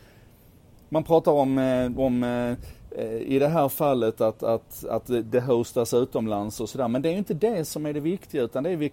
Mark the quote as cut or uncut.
uncut